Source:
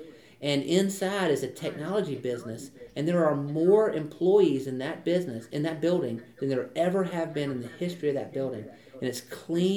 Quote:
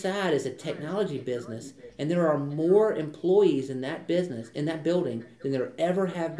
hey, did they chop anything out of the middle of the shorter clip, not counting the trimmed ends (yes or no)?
no